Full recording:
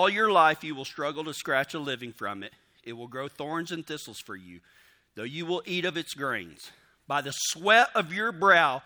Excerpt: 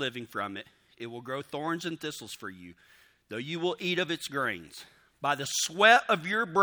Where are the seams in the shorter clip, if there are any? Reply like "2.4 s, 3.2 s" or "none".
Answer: none